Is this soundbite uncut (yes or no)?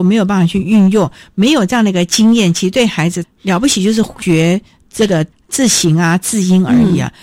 yes